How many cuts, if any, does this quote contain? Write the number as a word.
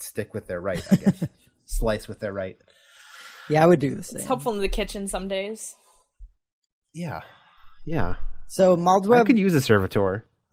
zero